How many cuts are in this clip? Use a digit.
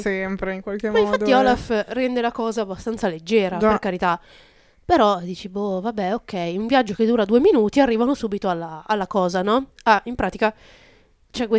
0